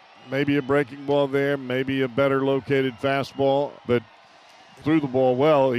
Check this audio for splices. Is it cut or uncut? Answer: cut